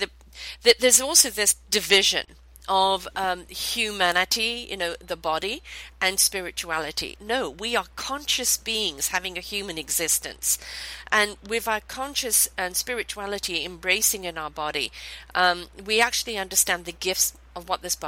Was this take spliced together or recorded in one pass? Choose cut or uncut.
cut